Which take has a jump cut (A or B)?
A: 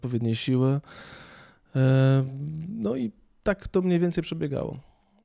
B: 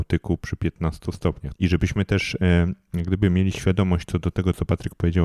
B